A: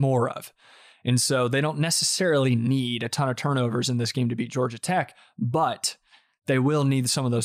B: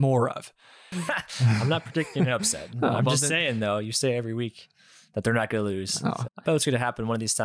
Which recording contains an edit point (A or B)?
B